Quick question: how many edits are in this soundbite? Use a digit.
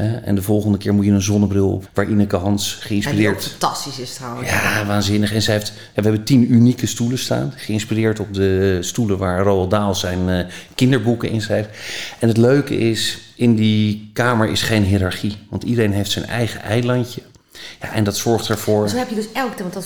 1